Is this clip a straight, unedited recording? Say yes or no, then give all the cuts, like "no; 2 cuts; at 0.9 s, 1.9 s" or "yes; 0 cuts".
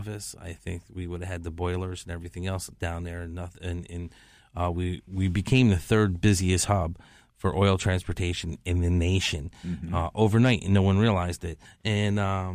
no; 1 cut; at 11.7 s